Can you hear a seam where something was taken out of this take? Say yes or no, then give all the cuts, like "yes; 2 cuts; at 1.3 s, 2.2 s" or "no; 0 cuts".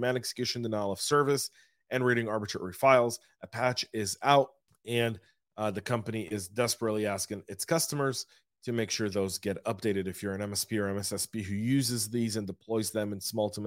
no; 0 cuts